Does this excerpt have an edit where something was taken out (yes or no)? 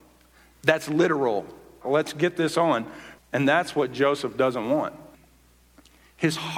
yes